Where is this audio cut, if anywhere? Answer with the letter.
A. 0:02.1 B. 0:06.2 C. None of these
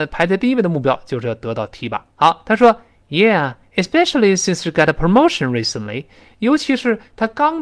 A